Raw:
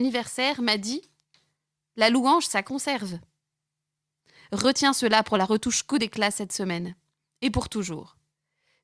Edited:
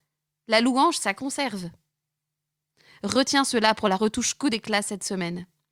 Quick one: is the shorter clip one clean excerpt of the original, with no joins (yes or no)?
yes